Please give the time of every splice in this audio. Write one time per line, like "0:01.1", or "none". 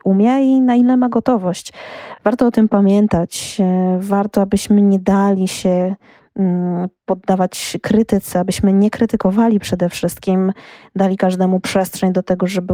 none